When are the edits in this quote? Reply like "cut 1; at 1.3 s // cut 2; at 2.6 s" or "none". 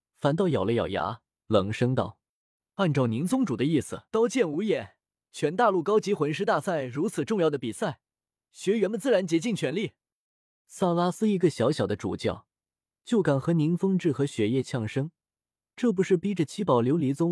cut 1; at 4.1 s // cut 2; at 10.6 s